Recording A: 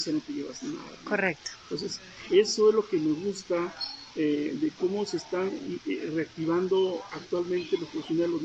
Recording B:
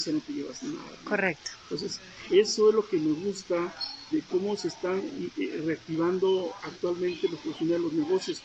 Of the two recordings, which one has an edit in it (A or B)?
B